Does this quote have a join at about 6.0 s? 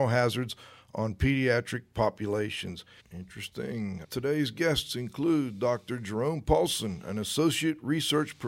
no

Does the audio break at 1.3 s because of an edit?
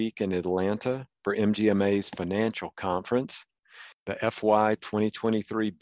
no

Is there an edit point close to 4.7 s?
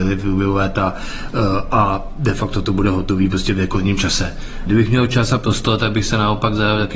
yes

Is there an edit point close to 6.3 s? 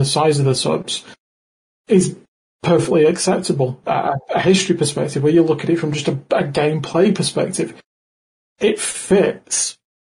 no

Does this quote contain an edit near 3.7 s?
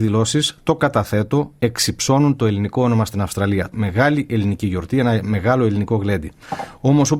yes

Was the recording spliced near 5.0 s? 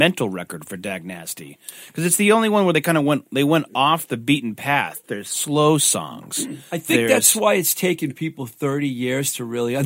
no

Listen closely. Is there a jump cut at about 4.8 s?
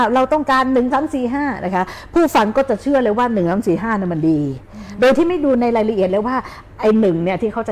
no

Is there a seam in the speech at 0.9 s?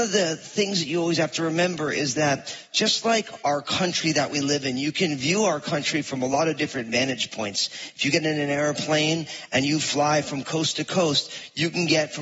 no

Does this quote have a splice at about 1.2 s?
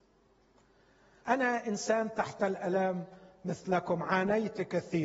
yes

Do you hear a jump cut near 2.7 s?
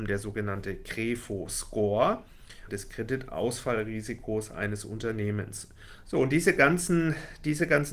yes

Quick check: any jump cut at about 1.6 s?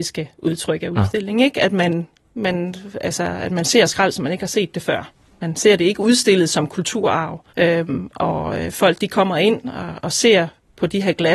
no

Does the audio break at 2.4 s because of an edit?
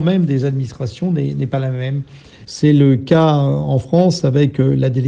yes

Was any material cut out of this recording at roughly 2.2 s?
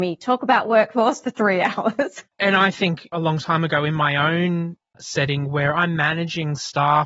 yes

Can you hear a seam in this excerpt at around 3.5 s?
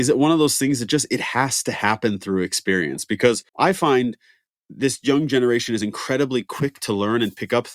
yes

